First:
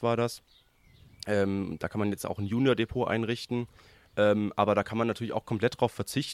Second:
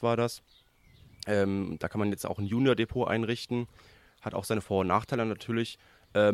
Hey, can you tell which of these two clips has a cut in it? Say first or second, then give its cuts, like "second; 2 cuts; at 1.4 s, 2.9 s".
first; 1 cut; at 4.0 s